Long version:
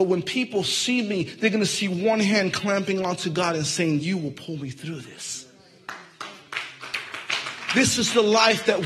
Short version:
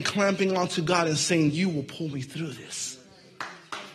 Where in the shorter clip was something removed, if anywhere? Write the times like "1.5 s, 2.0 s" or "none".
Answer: none